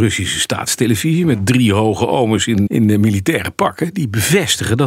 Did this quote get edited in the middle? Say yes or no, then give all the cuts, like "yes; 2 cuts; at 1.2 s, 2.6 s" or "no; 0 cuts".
yes; 1 cut; at 2.7 s